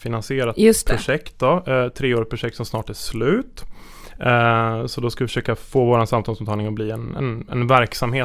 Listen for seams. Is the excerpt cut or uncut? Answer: uncut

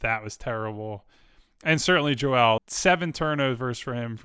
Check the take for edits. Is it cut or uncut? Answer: cut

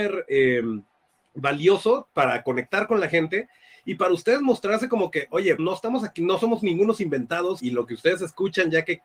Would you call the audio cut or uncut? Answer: cut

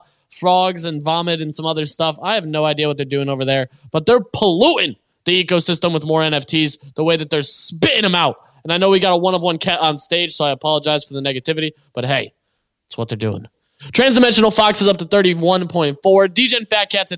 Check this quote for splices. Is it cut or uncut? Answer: uncut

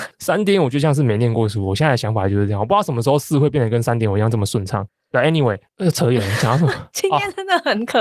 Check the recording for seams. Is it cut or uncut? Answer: uncut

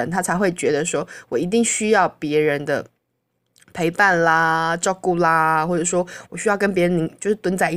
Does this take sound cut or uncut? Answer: uncut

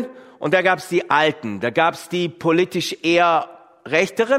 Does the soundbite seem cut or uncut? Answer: uncut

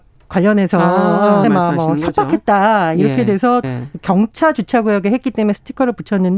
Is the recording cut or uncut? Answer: cut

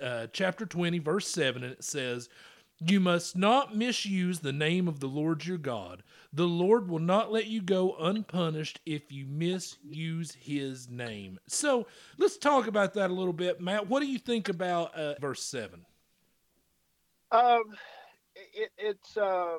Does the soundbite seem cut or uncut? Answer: cut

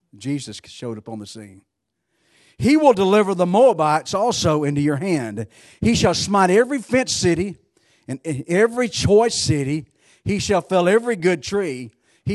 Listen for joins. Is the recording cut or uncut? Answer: uncut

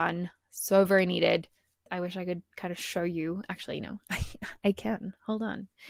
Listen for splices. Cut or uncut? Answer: uncut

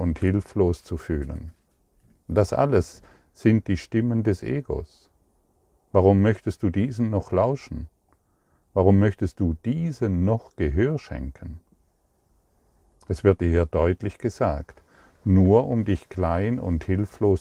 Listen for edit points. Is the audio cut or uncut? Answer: uncut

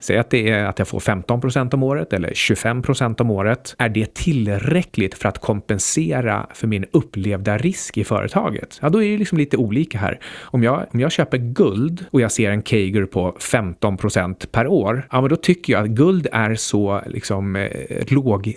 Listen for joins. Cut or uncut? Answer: uncut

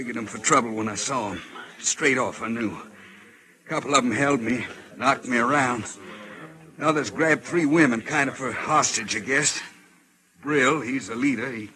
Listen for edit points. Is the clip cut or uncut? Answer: uncut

